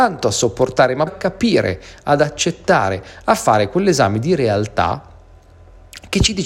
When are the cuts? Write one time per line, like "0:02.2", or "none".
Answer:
0:01.1